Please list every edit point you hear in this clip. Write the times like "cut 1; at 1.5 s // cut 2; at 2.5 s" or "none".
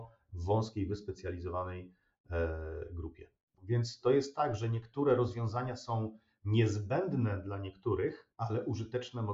cut 1; at 3.5 s